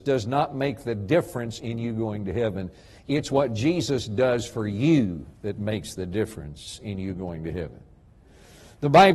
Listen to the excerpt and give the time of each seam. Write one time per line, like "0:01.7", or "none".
none